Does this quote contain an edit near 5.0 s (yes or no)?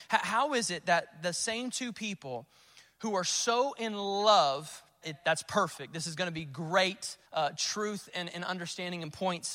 yes